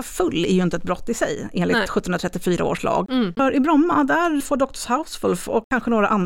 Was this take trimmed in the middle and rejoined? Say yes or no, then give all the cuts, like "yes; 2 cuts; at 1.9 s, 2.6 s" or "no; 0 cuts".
yes; 2 cuts; at 3.4 s, 4.4 s